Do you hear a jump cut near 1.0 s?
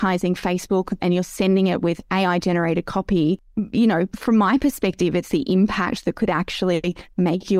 yes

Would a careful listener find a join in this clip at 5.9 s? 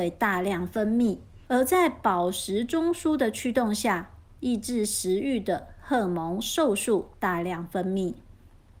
no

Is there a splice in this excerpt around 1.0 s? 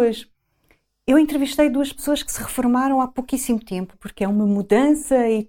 no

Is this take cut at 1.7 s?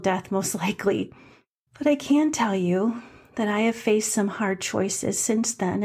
yes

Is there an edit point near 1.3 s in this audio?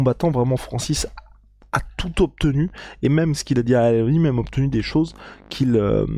no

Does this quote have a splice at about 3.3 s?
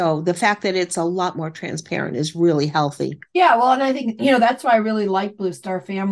yes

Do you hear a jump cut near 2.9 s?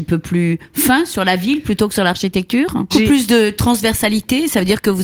yes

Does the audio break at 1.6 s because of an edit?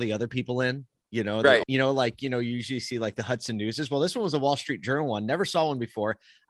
yes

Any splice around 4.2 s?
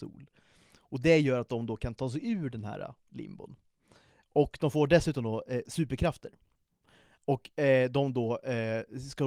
no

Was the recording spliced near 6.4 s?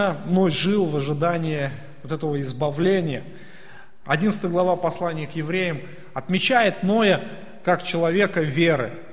no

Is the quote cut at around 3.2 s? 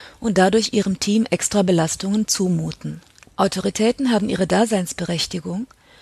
yes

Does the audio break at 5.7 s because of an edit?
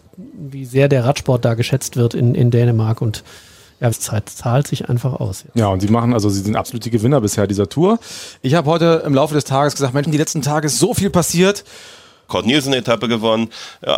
no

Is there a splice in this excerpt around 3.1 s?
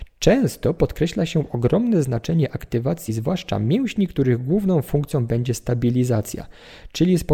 no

